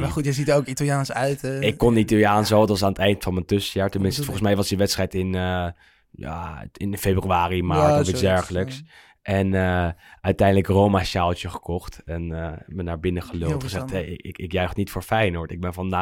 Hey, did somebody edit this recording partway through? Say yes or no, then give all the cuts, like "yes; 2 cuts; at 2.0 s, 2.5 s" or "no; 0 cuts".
no; 0 cuts